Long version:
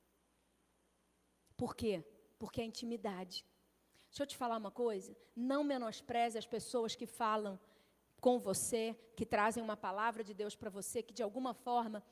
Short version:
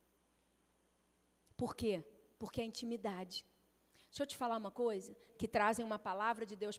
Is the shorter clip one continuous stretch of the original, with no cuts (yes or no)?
no